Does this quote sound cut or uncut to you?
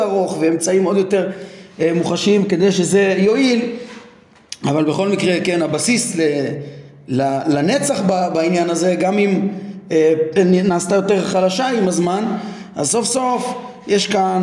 cut